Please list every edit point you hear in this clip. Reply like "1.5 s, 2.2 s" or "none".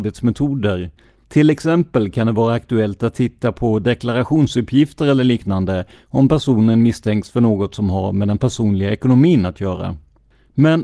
1.1 s